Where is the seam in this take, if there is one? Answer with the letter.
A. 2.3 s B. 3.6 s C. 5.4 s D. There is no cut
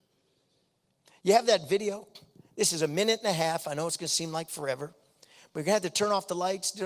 D